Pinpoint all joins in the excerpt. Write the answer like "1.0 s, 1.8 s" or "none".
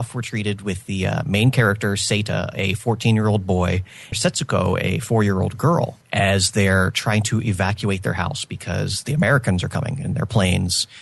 4.1 s, 6.0 s